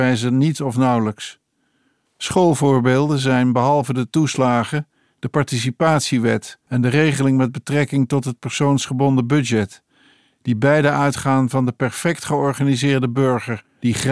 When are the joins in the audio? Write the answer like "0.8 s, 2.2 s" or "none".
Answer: 2.1 s